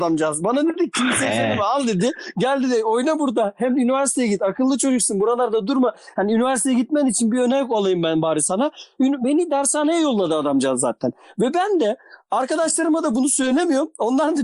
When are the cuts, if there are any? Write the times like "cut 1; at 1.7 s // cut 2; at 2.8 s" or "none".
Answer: none